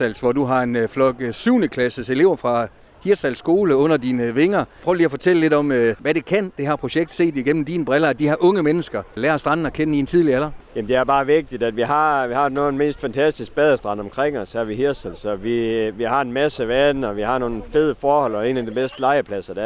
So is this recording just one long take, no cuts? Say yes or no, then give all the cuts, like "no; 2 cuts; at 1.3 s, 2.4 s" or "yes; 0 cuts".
yes; 0 cuts